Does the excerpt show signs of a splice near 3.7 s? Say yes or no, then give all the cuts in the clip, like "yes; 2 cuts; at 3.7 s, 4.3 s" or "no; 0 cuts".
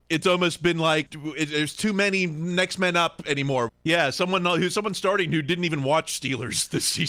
yes; 2 cuts; at 1.1 s, 3.7 s